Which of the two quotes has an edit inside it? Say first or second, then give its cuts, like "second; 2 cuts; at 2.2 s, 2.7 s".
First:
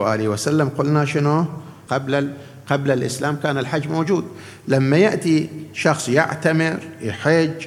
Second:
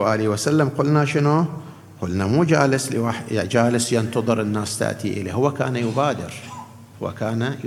first; 1 cut; at 1.9 s